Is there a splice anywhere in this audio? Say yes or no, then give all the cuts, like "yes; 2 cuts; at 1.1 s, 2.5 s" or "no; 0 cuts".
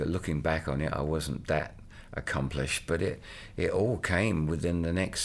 no; 0 cuts